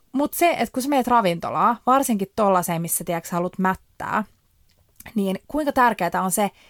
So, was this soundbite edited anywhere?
no; 0 cuts

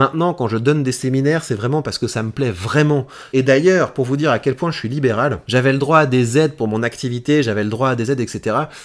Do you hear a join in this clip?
yes; 1 cut; at 3.3 s

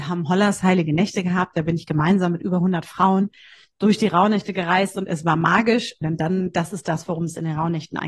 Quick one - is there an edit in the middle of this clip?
yes; 1 cut; at 6.0 s

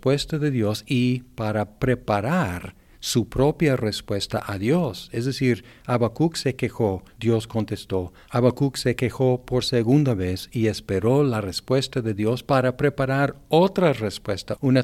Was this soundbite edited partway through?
no; 0 cuts

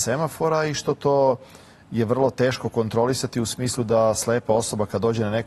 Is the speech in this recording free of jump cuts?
yes; 0 cuts

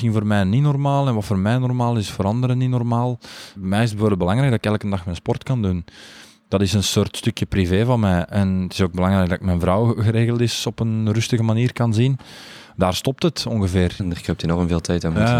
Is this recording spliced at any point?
yes; 2 cuts; at 3.6 s, 14.0 s

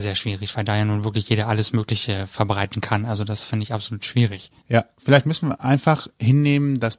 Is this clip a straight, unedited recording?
yes; 0 cuts

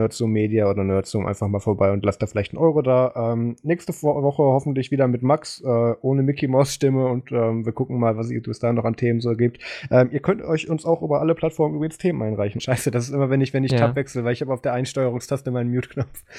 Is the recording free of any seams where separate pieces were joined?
no; 1 cut; at 12.6 s

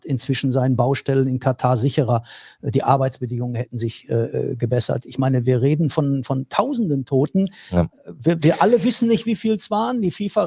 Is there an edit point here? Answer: no; 0 cuts

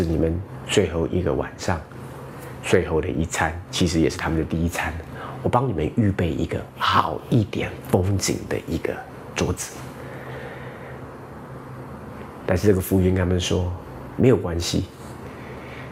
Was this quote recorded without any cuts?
no; 1 cut; at 12.4 s

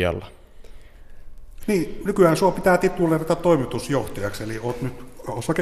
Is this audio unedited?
no; 1 cut; at 1.6 s

